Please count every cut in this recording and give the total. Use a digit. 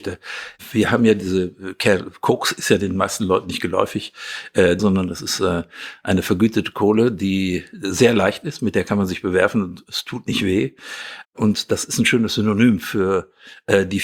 2